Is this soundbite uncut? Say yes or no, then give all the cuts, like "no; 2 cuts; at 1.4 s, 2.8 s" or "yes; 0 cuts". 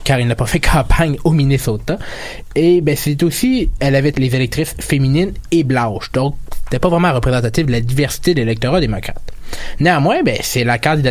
no; 1 cut; at 4.1 s